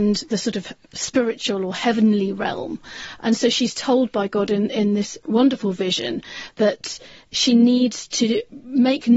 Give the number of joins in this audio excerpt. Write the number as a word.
zero